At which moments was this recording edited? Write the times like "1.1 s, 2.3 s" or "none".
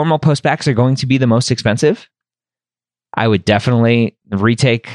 3.1 s